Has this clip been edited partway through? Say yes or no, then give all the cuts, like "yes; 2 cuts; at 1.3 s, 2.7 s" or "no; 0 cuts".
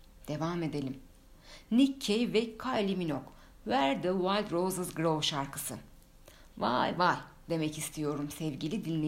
yes; 1 cut; at 7.0 s